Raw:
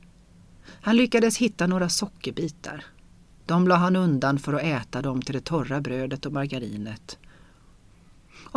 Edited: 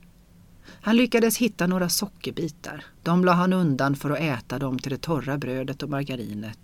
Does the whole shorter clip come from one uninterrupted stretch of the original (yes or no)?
no